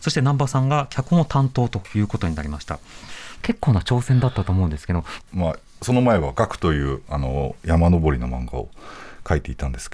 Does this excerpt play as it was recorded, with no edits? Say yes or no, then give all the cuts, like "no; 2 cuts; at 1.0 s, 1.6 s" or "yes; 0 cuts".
no; 2 cuts; at 3.4 s, 5.2 s